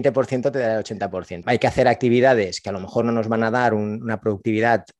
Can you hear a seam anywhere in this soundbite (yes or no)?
yes